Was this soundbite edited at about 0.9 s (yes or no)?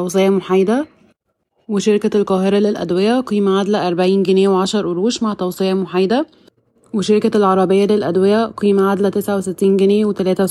no